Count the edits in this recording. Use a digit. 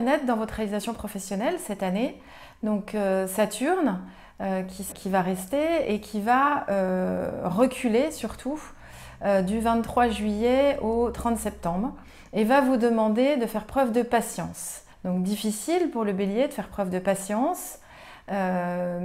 2